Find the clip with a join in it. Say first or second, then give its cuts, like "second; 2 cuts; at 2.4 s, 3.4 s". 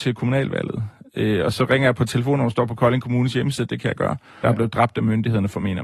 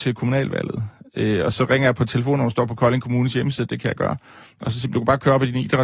first; 1 cut; at 4.4 s